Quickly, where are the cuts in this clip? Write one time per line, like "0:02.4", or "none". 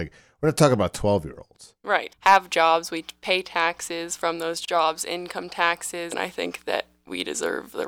0:02.1
0:06.1